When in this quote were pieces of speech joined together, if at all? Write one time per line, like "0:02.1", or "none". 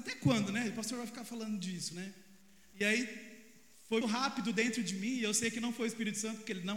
0:04.0

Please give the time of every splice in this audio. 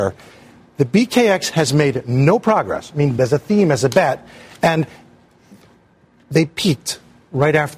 0:03.2

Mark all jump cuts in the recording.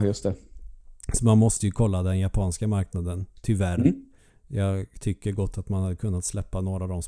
none

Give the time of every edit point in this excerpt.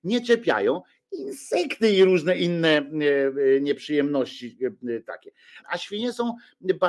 0:05.6

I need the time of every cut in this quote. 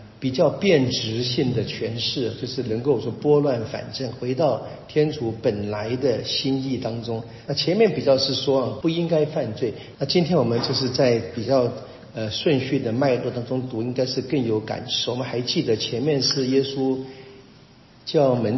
0:07.5
0:08.8
0:09.9

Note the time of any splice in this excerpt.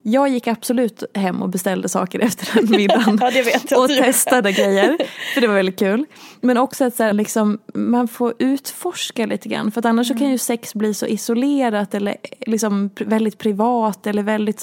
0:07.1

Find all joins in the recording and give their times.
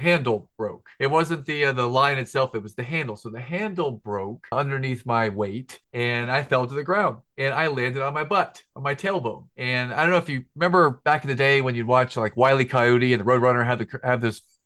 none

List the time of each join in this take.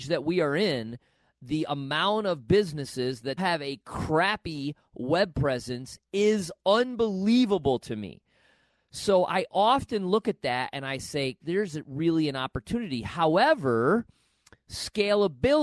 0:03.4
0:11.4

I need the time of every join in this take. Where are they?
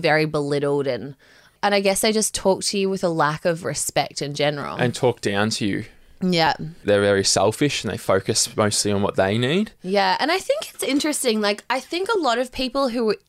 0:06.8

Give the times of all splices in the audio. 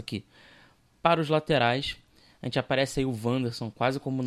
none

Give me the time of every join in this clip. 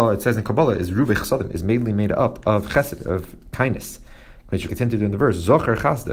0:04.7

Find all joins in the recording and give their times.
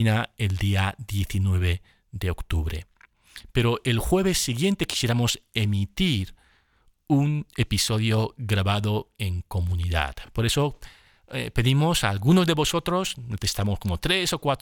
none

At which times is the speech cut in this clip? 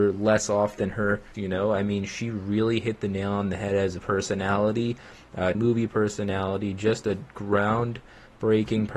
0:01.3
0:05.5

